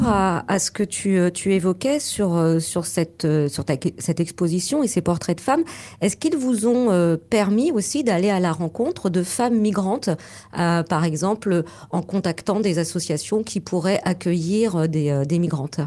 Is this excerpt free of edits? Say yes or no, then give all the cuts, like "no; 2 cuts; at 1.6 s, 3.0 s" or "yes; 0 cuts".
yes; 0 cuts